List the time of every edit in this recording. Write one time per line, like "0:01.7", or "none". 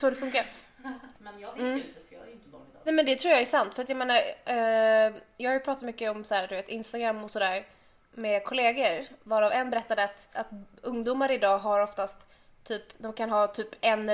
0:01.1
0:02.9
0:10.3